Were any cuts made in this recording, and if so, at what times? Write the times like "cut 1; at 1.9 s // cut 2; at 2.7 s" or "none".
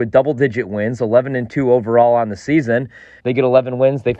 cut 1; at 3.2 s